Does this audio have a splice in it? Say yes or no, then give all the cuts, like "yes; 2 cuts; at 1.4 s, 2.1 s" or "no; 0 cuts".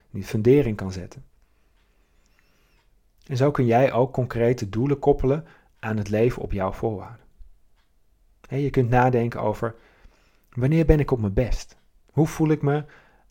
no; 0 cuts